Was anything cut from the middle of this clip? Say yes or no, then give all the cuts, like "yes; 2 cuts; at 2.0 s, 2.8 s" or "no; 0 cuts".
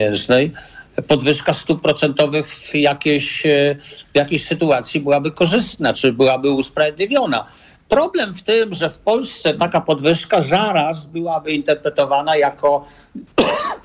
yes; 1 cut; at 5.9 s